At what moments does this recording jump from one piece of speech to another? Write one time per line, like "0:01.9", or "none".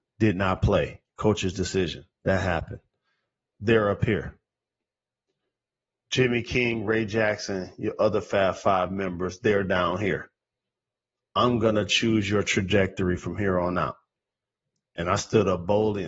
0:03.5

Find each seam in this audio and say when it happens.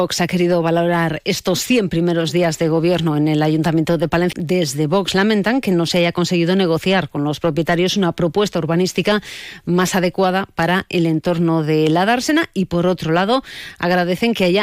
0:04.3

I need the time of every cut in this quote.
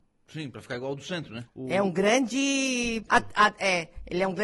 0:01.5
0:03.1

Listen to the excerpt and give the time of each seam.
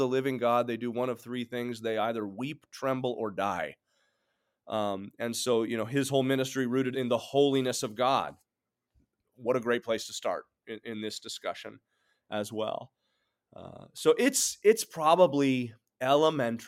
0:06.9

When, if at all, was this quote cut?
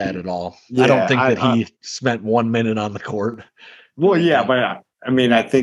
none

